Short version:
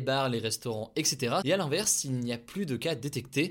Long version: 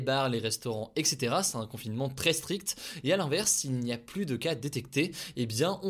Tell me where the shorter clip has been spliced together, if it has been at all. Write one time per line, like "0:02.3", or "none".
0:01.4